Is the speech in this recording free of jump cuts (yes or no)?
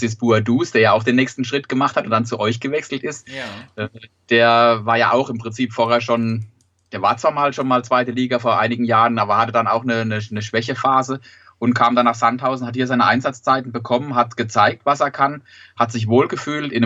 yes